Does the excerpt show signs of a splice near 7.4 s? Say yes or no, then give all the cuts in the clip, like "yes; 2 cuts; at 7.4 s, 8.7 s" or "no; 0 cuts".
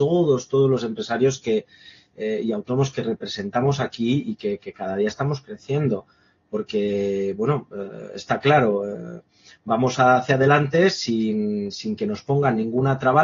no; 0 cuts